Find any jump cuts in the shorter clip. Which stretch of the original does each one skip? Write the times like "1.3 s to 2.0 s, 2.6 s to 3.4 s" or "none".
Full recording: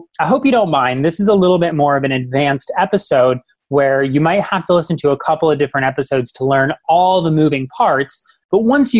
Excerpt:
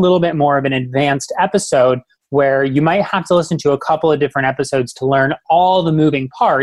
none